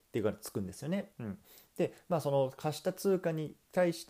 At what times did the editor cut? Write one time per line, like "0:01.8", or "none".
0:01.1